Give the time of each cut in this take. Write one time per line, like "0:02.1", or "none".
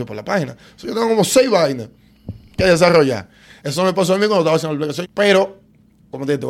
0:03.6
0:05.0